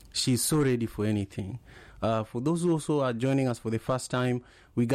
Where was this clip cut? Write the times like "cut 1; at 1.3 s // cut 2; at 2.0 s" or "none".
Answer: cut 1; at 1.9 s